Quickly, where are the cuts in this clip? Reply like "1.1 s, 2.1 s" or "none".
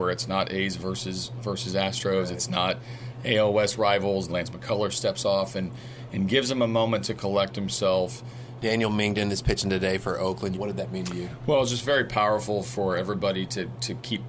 4.3 s, 8.6 s, 10.5 s